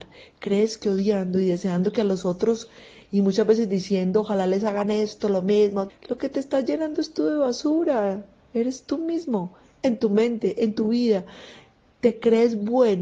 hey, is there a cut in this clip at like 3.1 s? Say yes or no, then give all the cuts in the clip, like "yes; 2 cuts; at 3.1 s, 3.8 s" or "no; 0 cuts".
no; 1 cut; at 5.9 s